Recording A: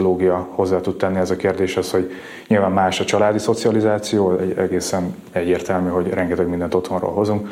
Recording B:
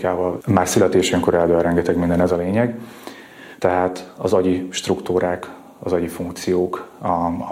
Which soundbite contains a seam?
B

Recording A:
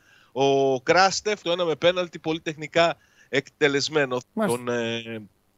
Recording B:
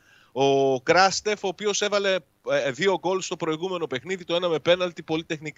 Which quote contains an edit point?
A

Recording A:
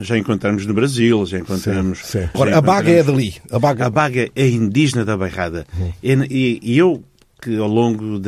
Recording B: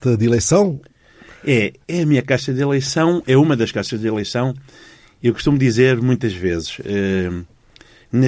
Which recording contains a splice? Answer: A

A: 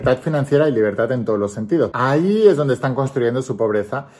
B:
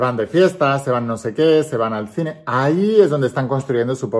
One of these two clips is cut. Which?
A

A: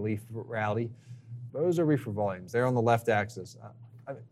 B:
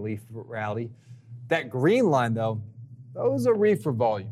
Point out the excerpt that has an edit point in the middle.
A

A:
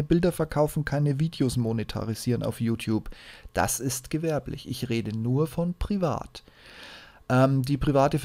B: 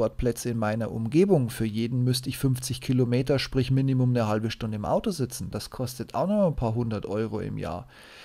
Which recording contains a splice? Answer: B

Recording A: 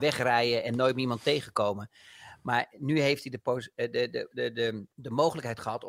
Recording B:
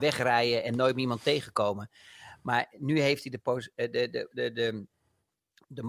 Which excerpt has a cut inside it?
A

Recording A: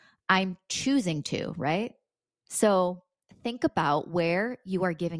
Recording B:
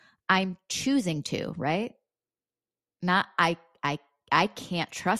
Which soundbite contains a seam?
A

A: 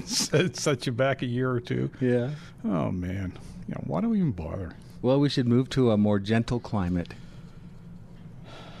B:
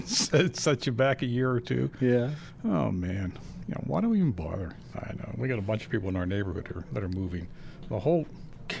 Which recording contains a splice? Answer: B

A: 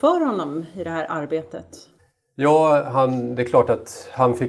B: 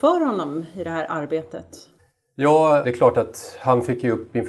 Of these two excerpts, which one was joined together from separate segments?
B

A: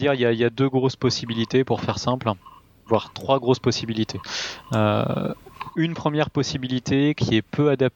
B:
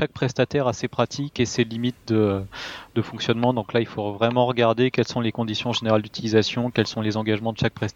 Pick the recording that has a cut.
A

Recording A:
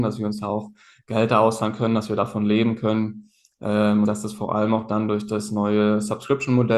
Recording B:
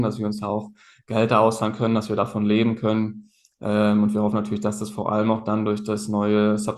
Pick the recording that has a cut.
A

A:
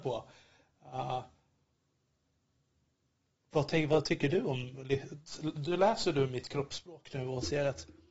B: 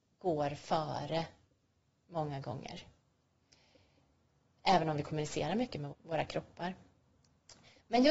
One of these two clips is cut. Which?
B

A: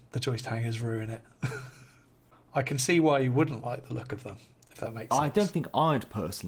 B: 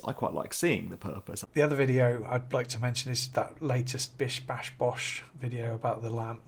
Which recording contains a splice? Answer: B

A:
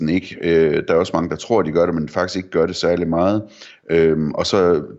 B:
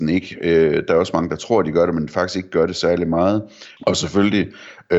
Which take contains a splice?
B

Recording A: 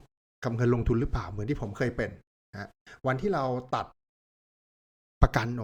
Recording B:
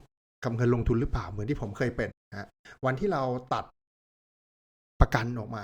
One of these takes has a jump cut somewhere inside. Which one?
B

